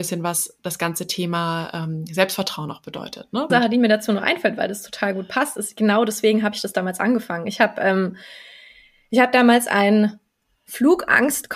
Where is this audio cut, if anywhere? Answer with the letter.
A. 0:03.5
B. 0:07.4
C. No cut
A